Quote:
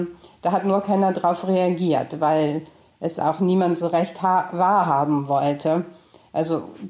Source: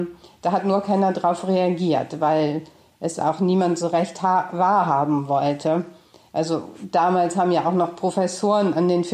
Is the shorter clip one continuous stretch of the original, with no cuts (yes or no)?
yes